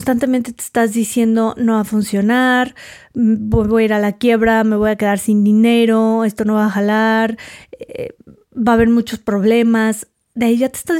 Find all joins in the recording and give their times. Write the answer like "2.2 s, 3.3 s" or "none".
none